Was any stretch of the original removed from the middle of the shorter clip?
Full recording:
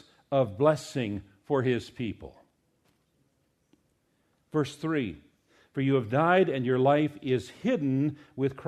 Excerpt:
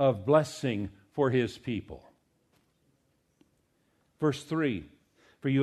no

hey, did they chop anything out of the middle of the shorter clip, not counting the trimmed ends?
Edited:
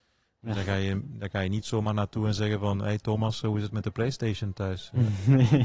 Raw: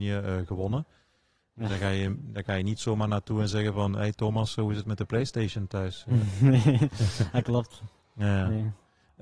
no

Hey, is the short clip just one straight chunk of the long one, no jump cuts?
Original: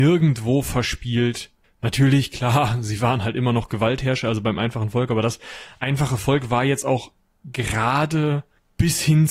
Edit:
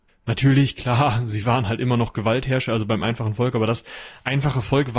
yes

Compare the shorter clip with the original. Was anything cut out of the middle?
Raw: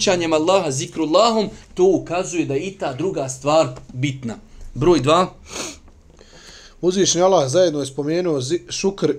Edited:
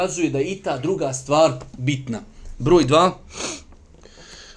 no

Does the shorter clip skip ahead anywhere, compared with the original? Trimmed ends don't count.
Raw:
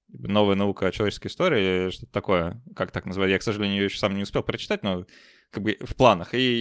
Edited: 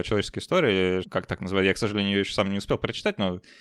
yes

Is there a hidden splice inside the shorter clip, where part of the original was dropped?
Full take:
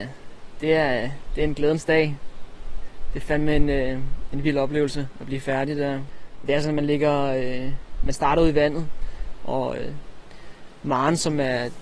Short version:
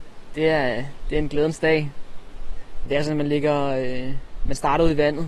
yes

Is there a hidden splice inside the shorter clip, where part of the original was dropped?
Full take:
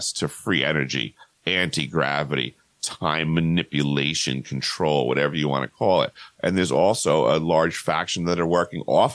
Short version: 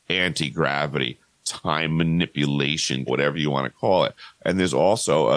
yes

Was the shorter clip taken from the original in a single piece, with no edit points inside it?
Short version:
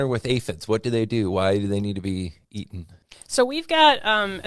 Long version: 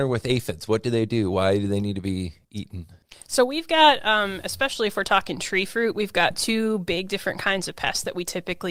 yes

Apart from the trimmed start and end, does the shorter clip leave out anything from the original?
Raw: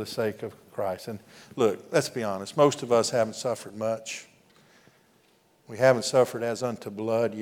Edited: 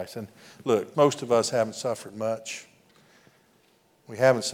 yes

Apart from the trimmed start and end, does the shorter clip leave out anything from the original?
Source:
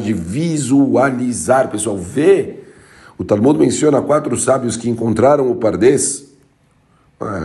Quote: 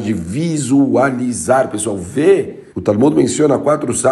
yes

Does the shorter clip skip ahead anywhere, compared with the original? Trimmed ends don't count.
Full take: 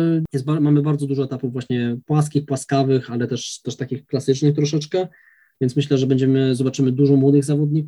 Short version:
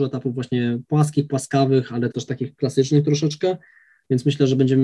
yes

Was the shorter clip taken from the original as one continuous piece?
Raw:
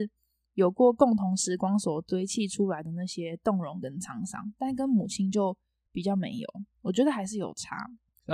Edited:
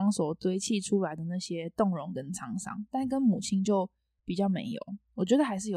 yes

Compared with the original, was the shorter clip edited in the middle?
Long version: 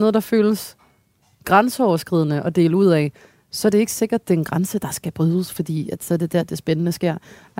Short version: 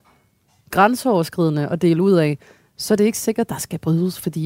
yes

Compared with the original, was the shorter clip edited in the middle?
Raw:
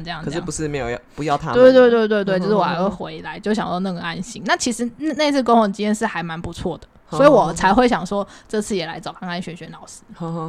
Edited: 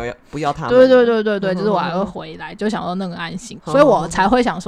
yes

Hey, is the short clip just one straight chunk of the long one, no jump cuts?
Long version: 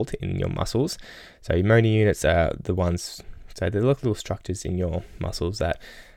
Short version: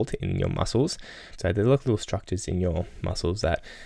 no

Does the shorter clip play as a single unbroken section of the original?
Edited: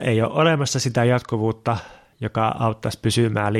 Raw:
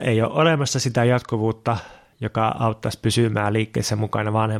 yes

